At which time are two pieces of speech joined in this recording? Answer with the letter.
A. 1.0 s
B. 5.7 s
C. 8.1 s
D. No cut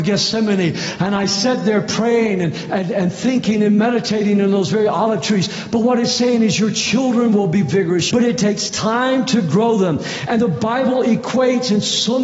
C